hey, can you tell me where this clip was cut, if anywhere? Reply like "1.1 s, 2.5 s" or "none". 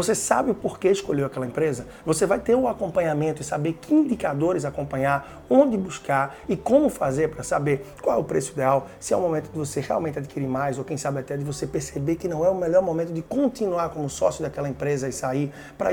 none